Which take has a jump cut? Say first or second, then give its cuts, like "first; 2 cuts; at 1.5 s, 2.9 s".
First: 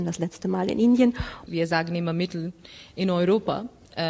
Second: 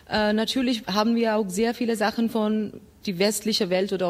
first; 1 cut; at 1.5 s